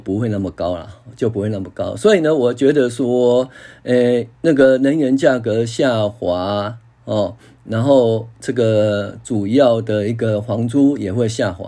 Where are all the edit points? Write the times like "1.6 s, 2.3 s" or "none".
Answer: 4.3 s